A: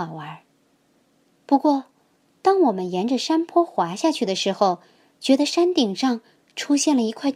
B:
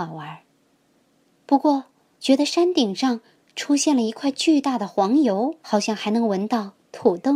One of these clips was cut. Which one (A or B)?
B